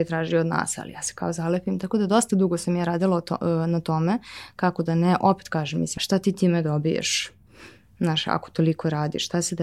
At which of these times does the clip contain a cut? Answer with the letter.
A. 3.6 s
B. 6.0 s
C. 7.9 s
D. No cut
B